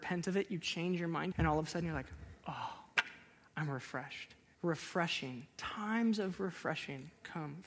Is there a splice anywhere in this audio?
yes; 2 cuts; at 1.3 s, 4.5 s

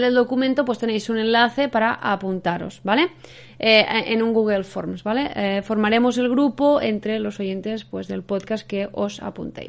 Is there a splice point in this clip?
no; 0 cuts

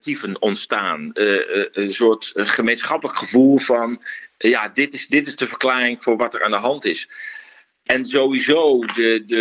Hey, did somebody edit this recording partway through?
no; 0 cuts

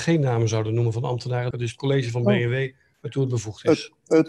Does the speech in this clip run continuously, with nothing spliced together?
no; 1 cut; at 1.5 s

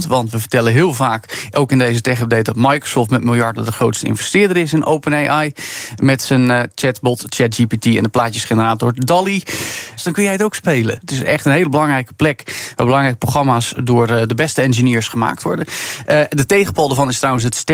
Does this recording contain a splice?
yes; 2 cuts; at 10.0 s, 11.0 s

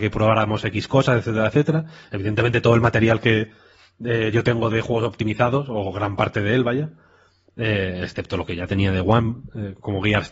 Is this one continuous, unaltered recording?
yes; 0 cuts

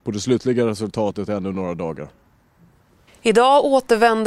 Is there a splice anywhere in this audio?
yes; 1 cut; at 3.1 s

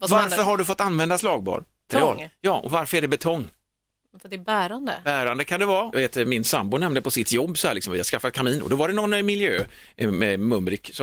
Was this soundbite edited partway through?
yes; 2 cuts; at 1.9 s, 5.9 s

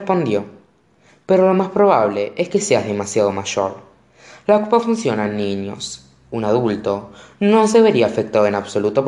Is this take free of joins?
yes; 0 cuts

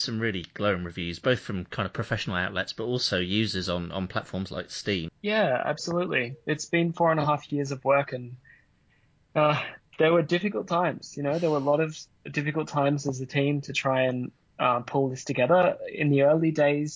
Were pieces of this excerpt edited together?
yes; 1 cut; at 5.1 s

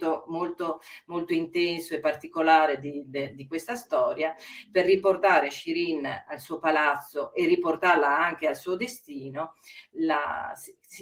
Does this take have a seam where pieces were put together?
no; 0 cuts

